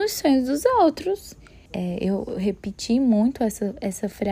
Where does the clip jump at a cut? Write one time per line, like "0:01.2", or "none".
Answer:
0:01.7